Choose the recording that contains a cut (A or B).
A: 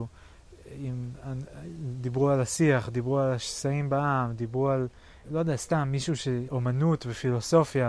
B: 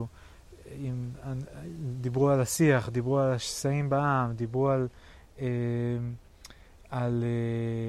A